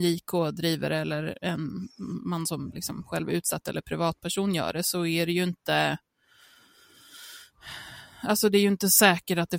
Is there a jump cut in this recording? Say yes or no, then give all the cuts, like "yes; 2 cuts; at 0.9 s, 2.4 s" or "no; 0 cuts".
no; 0 cuts